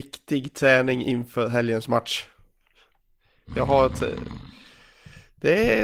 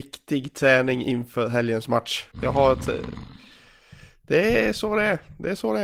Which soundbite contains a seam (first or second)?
second